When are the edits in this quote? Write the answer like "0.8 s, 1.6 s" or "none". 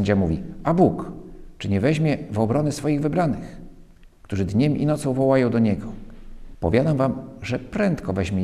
6.5 s